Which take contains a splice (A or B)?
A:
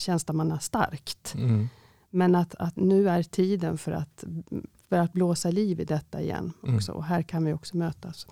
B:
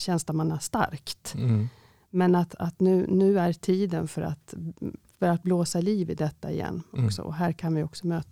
A